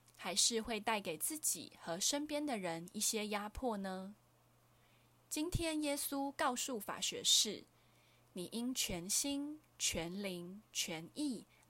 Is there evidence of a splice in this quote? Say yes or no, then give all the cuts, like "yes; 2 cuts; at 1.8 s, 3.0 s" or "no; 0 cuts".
no; 0 cuts